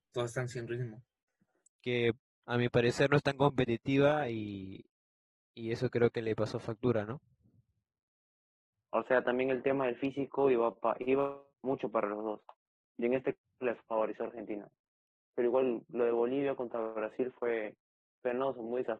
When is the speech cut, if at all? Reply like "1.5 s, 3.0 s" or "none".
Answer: 1.6 s, 8.7 s, 11.5 s